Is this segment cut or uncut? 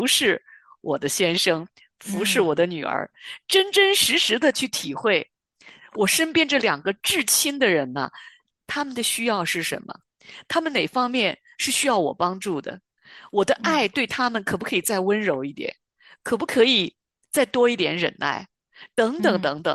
uncut